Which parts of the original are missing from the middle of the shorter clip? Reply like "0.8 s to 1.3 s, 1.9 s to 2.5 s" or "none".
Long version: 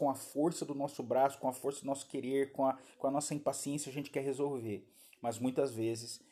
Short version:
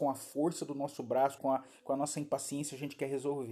1.4 s to 2.5 s